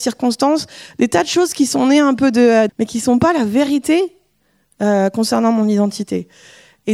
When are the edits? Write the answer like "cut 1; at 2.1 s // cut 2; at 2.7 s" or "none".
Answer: cut 1; at 2.7 s